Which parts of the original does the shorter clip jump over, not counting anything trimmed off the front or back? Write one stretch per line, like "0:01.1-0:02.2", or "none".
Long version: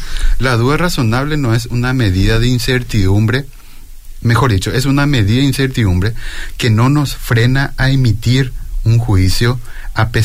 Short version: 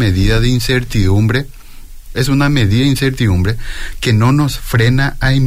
0:04.1-0:04.7